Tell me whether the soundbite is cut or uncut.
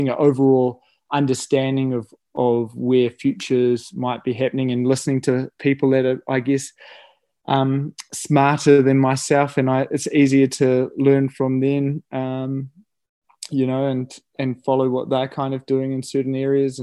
uncut